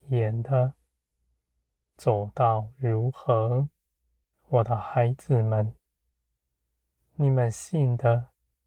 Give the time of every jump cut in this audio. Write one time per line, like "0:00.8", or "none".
0:01.9
0:04.3